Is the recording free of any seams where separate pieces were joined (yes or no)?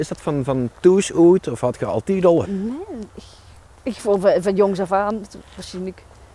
no